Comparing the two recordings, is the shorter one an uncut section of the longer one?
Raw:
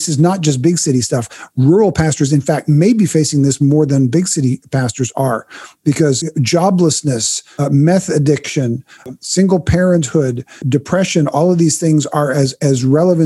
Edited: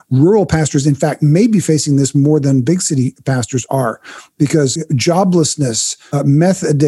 yes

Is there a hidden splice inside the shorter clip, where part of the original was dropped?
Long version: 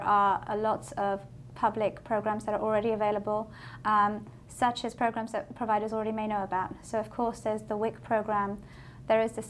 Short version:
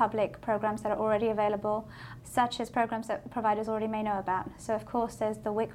yes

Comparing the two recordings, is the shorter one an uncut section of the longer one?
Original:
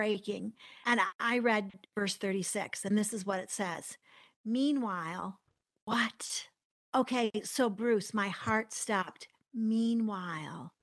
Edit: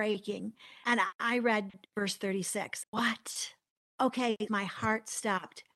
no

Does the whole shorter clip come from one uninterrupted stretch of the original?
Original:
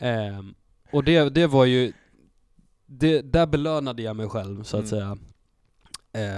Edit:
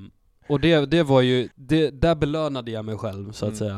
no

